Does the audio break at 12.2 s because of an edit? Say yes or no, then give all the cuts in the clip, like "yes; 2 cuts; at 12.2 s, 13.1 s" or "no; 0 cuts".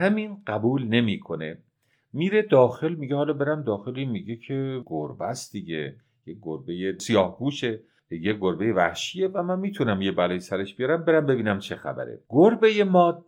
yes; 1 cut; at 12.2 s